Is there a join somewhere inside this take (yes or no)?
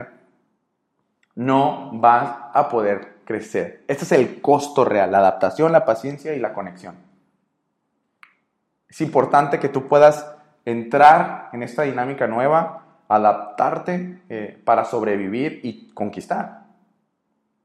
no